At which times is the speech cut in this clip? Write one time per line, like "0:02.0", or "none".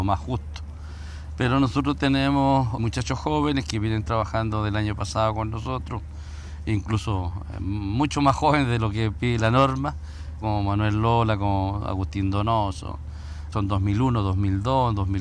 0:02.8
0:10.4
0:13.5